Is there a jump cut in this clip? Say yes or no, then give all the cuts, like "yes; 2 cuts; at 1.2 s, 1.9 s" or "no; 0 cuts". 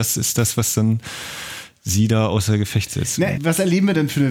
yes; 1 cut; at 3.4 s